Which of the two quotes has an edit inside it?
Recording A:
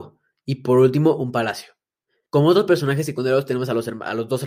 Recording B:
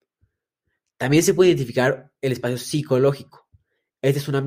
A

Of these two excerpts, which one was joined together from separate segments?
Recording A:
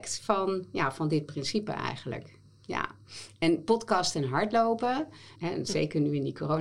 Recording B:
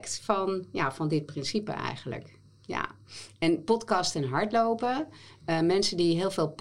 A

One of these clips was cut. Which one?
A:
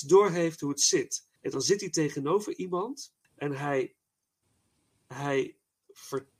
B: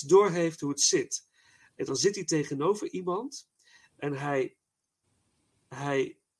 A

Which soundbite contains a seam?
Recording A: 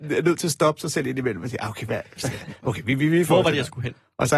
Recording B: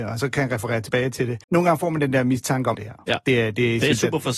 B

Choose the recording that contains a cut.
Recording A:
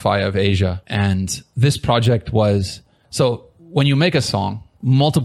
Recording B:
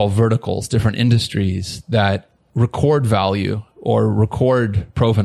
A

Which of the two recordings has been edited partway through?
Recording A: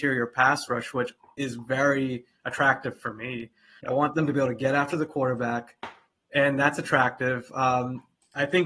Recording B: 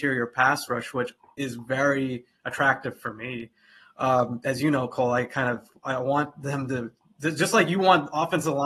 A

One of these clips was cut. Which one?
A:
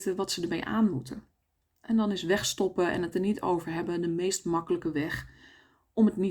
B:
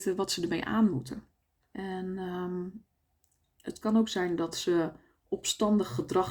B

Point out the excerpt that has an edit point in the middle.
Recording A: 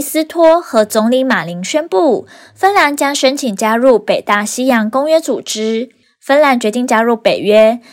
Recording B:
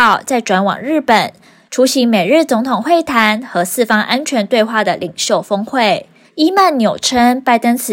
B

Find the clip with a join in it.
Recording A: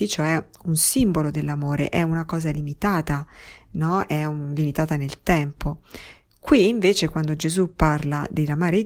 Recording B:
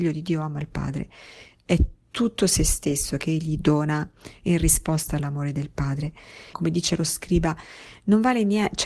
B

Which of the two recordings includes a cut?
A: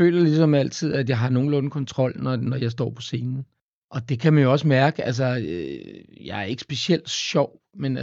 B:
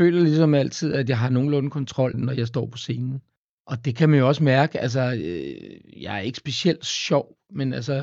B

